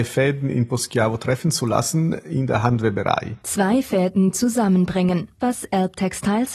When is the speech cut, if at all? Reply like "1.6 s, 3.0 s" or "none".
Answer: 3.4 s, 5.4 s